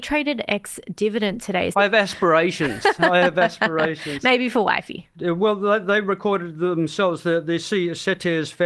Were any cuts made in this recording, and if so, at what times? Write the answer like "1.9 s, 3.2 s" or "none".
1.7 s